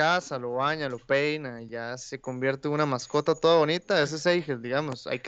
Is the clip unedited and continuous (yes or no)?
yes